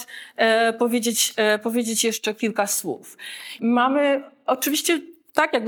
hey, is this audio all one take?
no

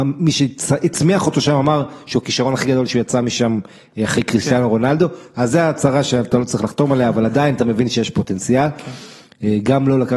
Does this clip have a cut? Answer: no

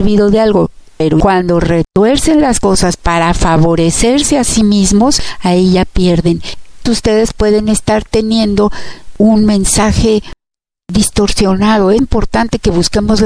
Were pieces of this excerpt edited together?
yes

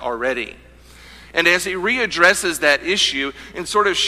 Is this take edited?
yes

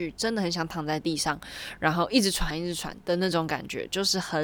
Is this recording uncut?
no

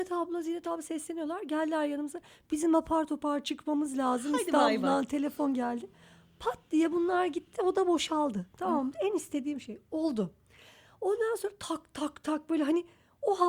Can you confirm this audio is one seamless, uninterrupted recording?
yes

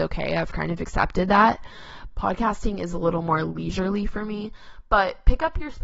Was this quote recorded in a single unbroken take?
no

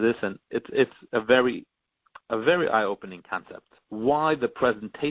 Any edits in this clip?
yes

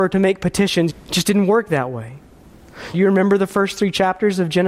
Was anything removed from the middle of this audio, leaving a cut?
yes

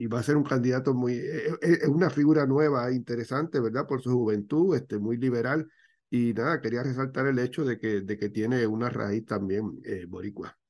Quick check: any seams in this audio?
no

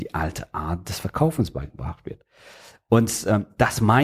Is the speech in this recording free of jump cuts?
yes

